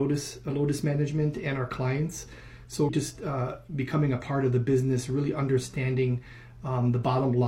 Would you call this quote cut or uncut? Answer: cut